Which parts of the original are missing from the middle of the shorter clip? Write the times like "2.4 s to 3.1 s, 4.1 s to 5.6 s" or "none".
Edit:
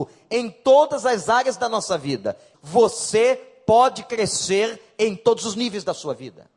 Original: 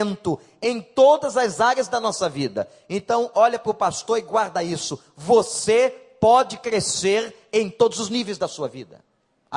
2.9 s to 5.1 s

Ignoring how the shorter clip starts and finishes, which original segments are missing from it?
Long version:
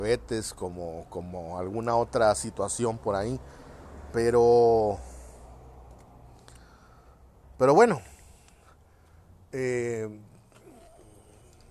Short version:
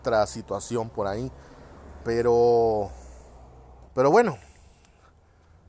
6.0 s to 7.5 s

